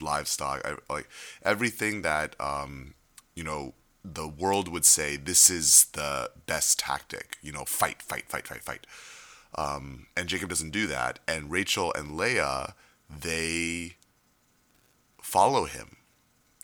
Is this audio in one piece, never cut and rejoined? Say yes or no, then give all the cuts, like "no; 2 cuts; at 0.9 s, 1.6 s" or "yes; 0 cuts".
no; 1 cut; at 10.1 s